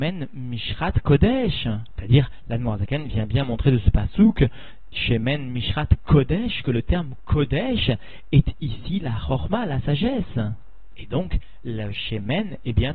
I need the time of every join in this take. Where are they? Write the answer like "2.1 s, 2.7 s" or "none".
2.0 s